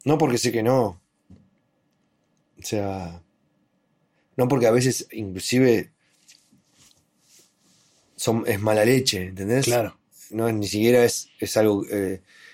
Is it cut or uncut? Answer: uncut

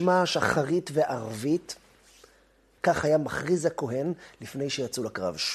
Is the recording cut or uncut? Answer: cut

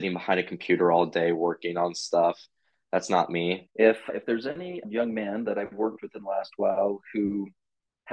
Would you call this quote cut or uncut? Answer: cut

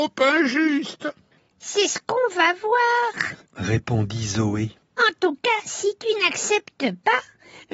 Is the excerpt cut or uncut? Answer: uncut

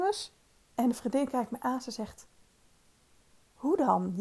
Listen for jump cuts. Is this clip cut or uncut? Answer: uncut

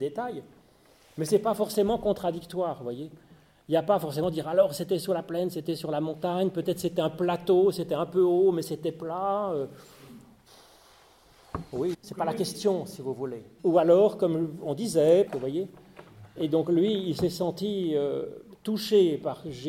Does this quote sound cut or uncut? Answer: cut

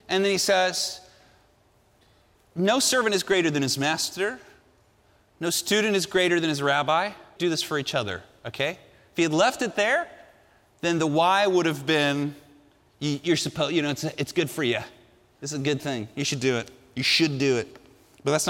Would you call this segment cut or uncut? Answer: cut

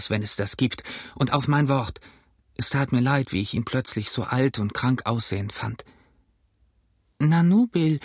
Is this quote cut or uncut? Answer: uncut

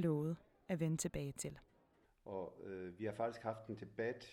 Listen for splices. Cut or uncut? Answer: cut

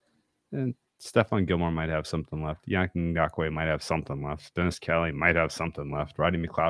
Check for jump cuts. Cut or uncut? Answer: uncut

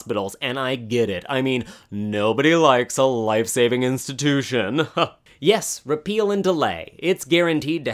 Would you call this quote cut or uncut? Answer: cut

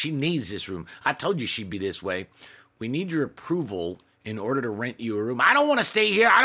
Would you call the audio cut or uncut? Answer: uncut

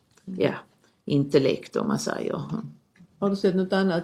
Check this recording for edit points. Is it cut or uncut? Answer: uncut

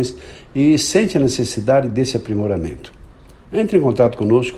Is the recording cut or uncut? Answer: uncut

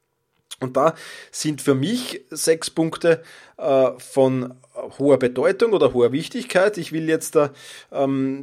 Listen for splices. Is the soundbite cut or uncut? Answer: uncut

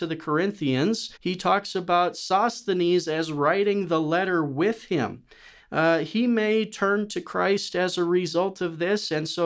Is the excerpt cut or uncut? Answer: cut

